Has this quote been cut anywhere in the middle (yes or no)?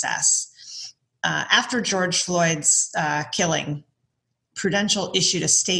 no